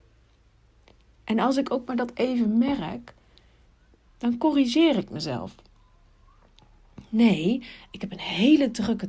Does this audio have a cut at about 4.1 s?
yes; 1 cut; at 4.1 s

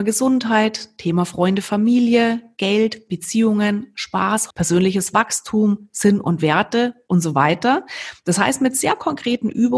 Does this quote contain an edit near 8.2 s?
no; 1 cut; at 4.5 s

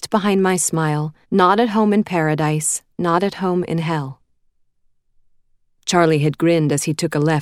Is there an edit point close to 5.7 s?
no; 1 cut; at 1.2 s

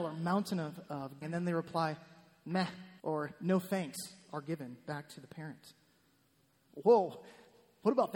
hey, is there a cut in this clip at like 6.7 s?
yes; 3 cuts; at 1.2 s, 3.0 s, 6.7 s

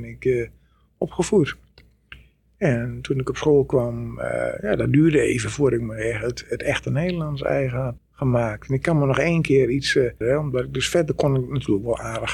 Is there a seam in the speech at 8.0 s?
yes; 2 cuts; at 8.0 s, 10.2 s

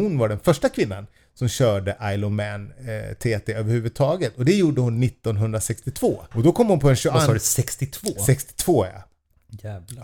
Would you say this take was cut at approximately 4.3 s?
no; 0 cuts

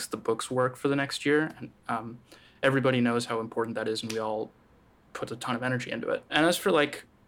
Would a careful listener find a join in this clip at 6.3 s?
yes; 1 cut; at 6.3 s

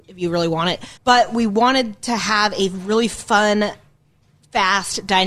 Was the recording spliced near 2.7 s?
no; 1 cut; at 1.0 s

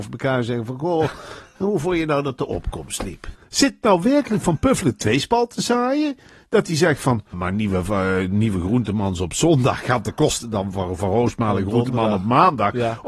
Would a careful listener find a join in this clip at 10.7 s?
no; 2 cuts; at 3.4 s, 7.3 s

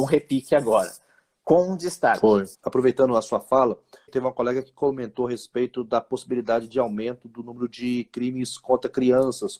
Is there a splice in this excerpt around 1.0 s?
no; 2 cuts; at 2.5 s, 4.1 s

